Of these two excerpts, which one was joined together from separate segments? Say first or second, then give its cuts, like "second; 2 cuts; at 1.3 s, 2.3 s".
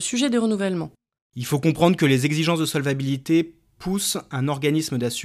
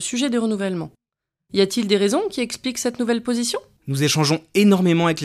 first; 1 cut; at 1.2 s